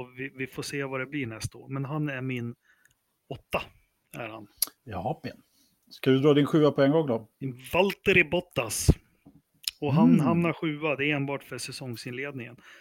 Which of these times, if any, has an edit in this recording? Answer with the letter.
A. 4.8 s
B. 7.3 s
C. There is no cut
A